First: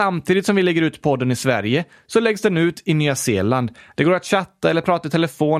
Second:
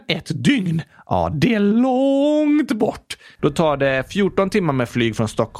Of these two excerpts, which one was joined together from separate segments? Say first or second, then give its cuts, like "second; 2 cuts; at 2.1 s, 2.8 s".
second; 1 cut; at 3.4 s